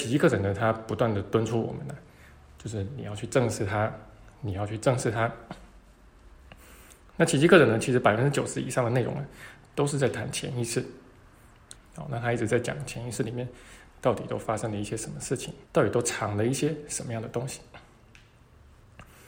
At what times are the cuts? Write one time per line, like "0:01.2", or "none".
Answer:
0:11.8
0:15.7